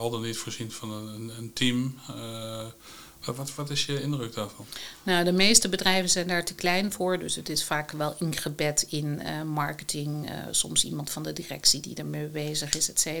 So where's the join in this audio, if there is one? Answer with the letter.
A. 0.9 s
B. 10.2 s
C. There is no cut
C